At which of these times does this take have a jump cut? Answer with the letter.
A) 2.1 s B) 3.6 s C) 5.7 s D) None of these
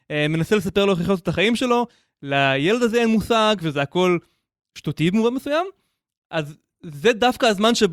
B